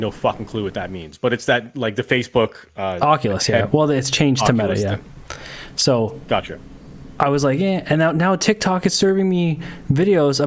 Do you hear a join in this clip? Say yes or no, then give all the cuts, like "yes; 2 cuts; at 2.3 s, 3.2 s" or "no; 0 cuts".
yes; 1 cut; at 7.1 s